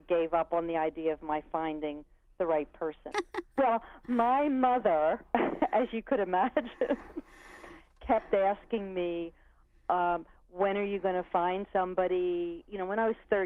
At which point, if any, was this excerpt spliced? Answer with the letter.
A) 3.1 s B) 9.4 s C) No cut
A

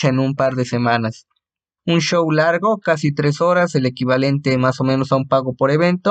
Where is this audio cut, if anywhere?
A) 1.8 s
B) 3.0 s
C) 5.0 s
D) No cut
A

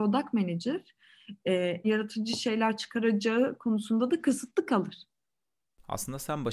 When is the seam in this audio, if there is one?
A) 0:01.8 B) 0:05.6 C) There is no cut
A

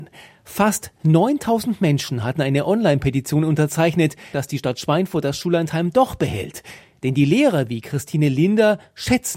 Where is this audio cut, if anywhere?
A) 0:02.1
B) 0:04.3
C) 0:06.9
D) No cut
B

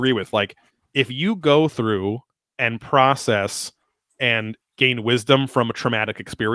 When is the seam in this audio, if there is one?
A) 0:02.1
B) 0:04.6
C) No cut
B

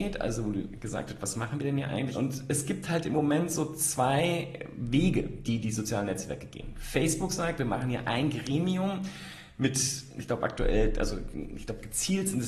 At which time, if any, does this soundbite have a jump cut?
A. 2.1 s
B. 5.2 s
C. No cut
A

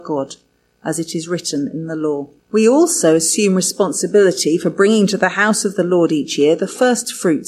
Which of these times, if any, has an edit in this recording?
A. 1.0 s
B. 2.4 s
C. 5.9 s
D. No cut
B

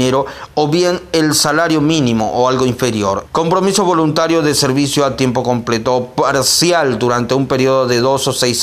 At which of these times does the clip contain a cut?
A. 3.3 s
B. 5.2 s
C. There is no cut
A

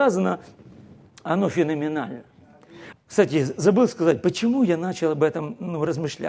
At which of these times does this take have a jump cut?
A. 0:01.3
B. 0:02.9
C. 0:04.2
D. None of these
B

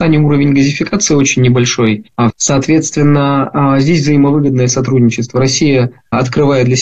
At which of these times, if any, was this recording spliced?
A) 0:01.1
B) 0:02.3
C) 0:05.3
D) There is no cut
B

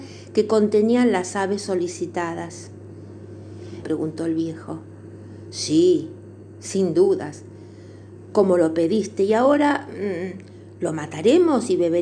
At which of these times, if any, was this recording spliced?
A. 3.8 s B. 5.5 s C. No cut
A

